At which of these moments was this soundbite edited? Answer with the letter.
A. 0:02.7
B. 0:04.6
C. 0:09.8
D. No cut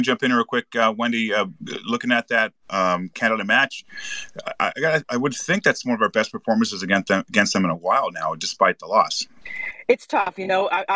A